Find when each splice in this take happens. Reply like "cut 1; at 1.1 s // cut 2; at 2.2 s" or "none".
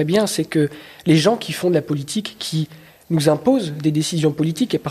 none